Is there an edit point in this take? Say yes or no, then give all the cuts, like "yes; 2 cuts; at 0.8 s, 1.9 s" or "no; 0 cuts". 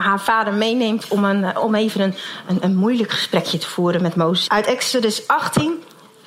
yes; 1 cut; at 4.5 s